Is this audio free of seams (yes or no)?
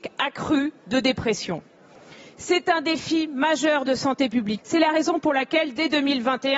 no